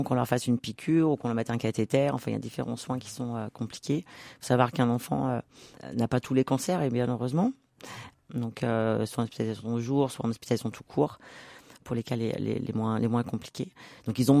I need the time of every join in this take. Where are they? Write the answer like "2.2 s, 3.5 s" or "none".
8.1 s